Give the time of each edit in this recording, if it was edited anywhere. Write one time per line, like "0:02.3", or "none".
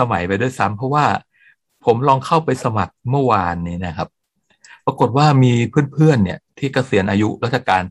none